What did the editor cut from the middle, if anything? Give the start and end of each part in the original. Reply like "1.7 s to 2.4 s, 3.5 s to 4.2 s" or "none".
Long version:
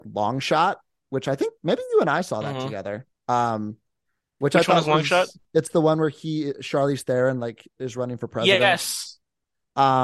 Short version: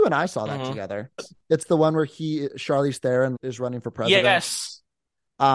3.1 s to 5.2 s, 7.4 s to 7.7 s